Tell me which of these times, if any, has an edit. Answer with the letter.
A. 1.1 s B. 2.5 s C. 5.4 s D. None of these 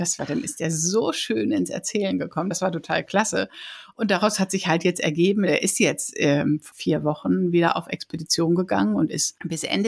D